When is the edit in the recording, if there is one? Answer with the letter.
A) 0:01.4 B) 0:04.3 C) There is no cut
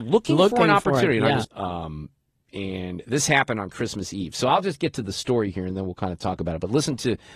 A